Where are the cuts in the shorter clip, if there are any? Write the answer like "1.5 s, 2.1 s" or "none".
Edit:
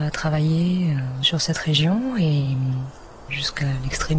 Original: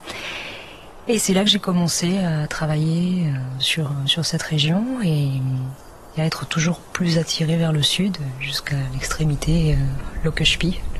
1.2 s, 3.3 s